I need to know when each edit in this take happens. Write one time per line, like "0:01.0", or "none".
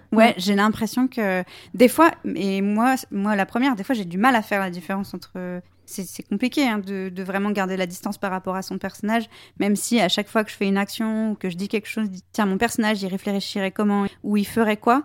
0:12.2
0:14.1